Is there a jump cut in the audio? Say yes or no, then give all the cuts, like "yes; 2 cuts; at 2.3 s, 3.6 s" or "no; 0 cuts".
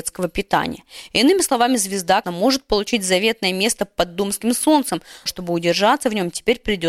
yes; 2 cuts; at 2.2 s, 5.3 s